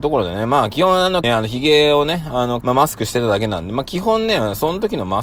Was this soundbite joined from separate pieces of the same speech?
yes; 2 cuts; at 1.2 s, 2.6 s

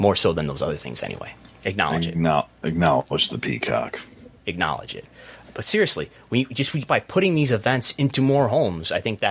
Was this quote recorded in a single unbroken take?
no; 2 cuts; at 1.5 s, 6.9 s

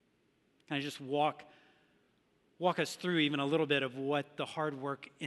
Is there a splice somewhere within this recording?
no; 0 cuts

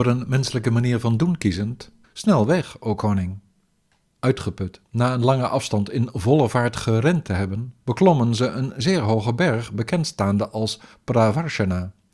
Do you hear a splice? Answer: yes; 2 cuts; at 4.1 s, 7.8 s

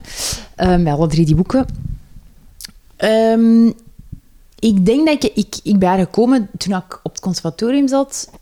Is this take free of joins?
no; 1 cut; at 5.8 s

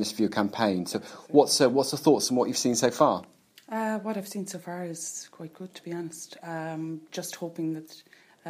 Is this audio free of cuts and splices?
yes; 0 cuts

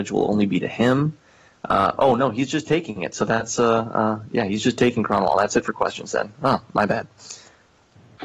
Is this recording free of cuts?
yes; 0 cuts

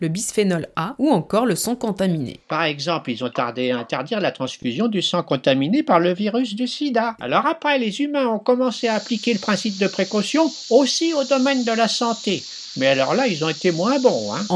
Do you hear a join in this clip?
yes; 1 cut; at 7.2 s

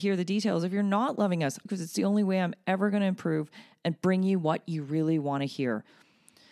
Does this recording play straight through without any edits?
no; 1 cut; at 1.7 s

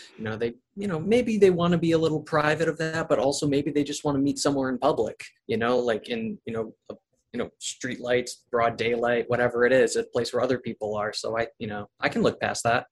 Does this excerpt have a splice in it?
no; 0 cuts

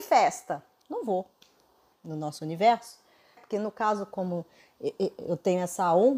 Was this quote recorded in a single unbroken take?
no; 2 cuts; at 1.9 s, 3.4 s

